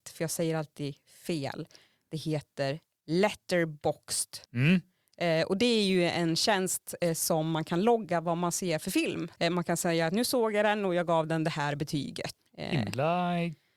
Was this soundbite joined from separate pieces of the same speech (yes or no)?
yes